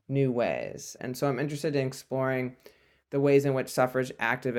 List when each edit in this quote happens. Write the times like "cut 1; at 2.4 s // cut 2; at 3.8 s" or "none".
cut 1; at 1.0 s